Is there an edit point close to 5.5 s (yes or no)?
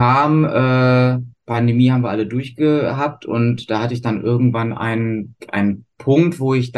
no